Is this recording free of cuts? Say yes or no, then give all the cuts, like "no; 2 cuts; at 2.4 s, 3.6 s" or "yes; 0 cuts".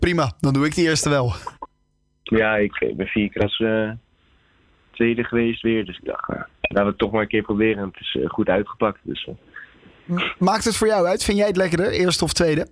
yes; 0 cuts